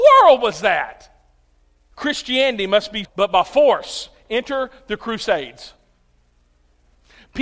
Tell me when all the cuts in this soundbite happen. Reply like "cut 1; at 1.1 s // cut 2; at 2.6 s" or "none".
cut 1; at 1.9 s // cut 2; at 3.0 s